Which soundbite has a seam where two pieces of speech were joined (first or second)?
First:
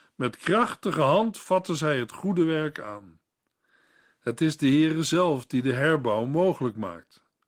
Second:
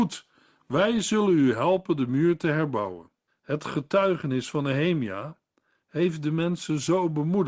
second